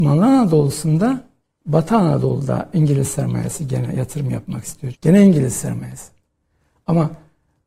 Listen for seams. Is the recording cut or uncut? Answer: cut